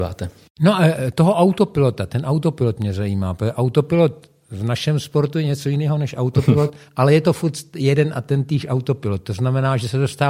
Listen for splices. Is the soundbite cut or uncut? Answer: uncut